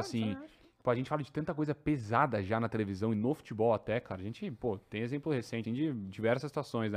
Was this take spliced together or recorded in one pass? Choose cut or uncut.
cut